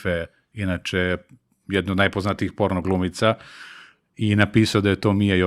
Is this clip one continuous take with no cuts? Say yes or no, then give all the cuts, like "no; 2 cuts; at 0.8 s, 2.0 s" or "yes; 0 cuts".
yes; 0 cuts